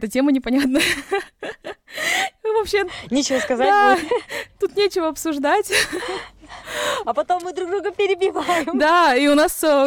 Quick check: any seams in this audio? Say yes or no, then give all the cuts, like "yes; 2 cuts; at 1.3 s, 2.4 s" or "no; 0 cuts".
yes; 1 cut; at 7.0 s